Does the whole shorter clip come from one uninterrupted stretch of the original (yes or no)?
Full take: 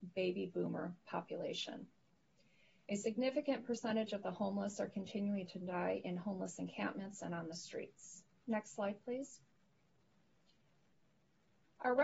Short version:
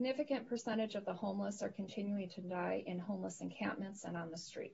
yes